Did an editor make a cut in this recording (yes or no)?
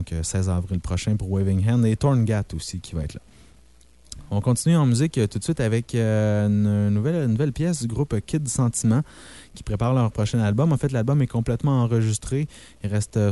no